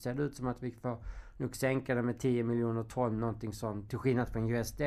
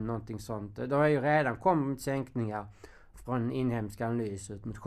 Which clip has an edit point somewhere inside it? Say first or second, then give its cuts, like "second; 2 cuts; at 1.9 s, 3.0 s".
first; 1 cut; at 3.9 s